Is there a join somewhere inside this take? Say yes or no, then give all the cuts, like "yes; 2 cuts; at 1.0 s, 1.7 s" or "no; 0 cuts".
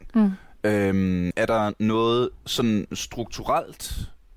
yes; 1 cut; at 1.3 s